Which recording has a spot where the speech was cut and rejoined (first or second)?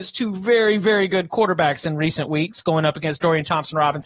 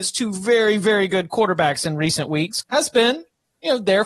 second